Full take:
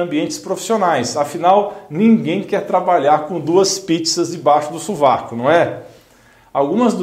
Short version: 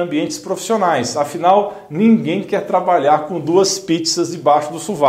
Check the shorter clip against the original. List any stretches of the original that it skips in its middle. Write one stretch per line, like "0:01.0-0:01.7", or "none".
none